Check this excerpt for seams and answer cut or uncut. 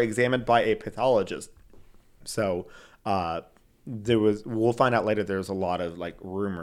cut